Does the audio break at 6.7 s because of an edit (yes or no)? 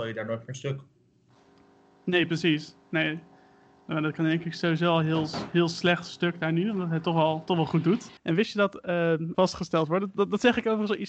no